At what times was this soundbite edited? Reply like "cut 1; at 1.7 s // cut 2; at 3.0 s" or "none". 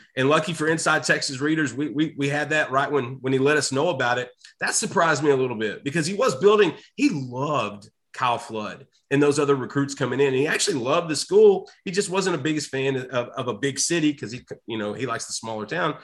none